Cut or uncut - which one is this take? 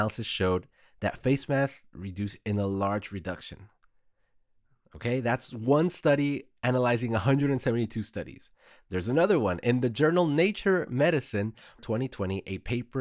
cut